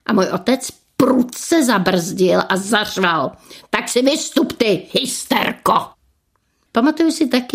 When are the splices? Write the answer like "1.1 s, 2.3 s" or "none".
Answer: 4.9 s